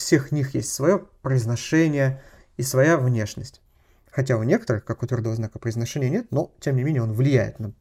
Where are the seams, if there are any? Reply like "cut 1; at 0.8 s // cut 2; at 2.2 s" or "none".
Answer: none